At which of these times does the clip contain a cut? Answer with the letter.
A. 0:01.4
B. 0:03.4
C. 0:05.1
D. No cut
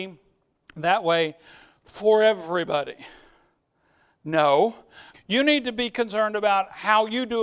C